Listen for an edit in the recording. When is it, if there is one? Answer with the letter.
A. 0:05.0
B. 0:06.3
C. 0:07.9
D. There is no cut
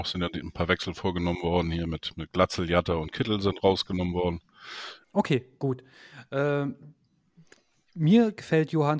A